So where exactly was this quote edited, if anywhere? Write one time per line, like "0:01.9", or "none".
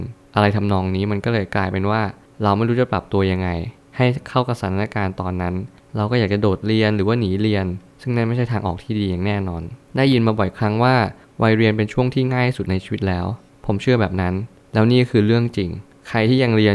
none